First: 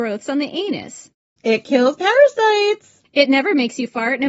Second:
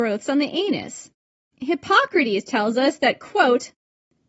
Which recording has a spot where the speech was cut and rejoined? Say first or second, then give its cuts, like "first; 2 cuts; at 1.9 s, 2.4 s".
first; 1 cut; at 1.4 s